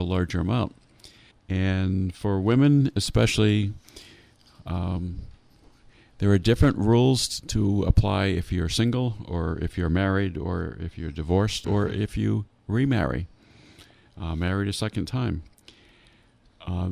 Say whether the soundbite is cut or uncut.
cut